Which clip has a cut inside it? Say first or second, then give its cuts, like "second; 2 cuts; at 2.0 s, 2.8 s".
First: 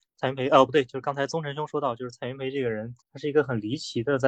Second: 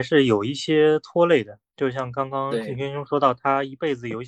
first; 1 cut; at 3.0 s